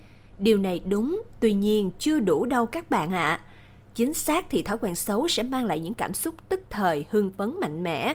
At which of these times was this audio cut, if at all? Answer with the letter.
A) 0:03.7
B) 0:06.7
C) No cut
C